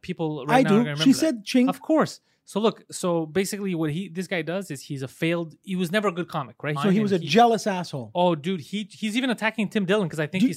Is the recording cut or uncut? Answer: cut